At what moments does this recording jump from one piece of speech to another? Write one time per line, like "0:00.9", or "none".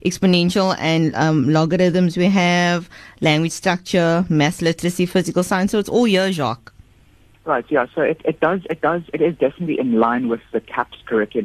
0:07.3